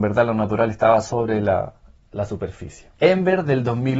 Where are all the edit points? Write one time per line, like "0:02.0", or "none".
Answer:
0:02.9